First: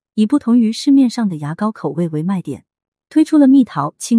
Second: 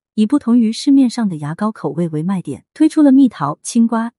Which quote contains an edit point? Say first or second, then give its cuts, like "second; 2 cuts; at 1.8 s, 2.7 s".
second; 1 cut; at 2.7 s